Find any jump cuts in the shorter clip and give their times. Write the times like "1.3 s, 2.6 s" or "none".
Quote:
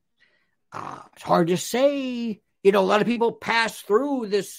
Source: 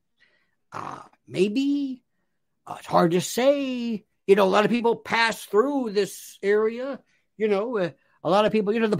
1.2 s